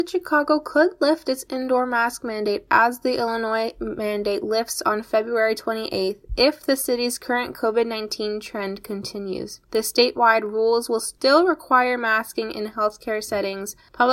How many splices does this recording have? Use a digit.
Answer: 1